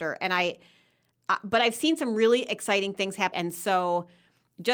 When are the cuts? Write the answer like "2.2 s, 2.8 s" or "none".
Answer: 3.3 s